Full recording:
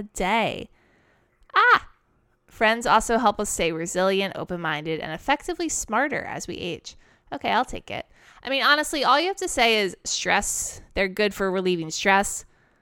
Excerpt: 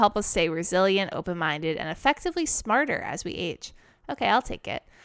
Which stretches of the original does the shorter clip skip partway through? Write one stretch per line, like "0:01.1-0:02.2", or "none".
none

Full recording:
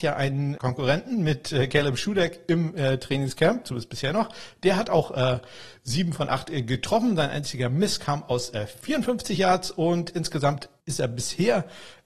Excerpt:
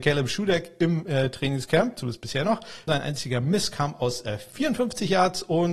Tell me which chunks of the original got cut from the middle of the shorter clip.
0:04.6-0:07.2

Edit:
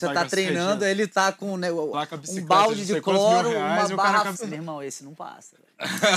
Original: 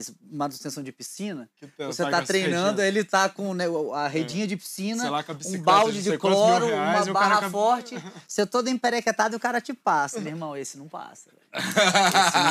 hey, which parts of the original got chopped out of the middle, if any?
0:03.9-0:05.1
0:07.5-0:10.1

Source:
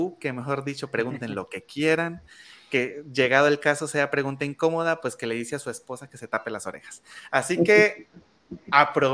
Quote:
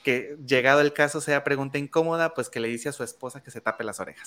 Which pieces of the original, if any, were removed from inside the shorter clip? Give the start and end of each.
none

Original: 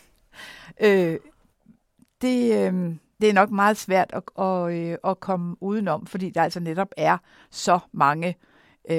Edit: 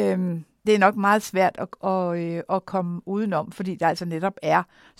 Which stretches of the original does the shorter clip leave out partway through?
none

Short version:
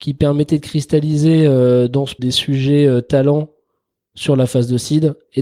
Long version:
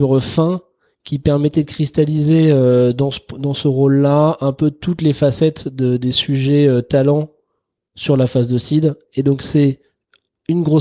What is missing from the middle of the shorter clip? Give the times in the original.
0:03.2-0:06.0

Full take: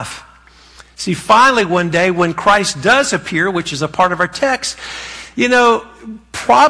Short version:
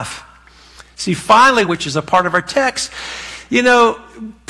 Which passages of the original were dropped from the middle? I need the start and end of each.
0:01.7-0:03.5

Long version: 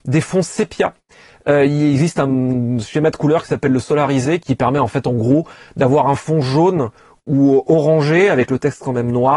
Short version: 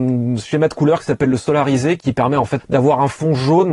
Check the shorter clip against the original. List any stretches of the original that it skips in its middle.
0:05.0-0:05.7

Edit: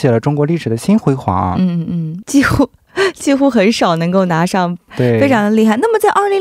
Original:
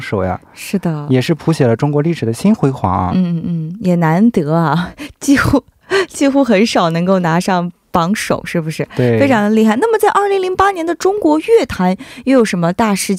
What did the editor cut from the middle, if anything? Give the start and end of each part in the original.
0:03.8-0:05.2
0:07.8-0:08.9

